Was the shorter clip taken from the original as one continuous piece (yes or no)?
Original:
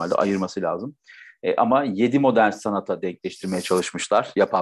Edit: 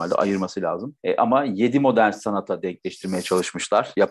no